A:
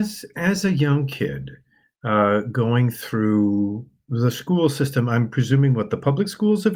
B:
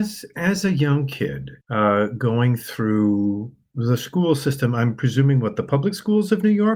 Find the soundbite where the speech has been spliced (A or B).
B